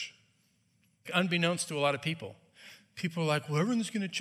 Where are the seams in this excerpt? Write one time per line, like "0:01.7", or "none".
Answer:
0:01.0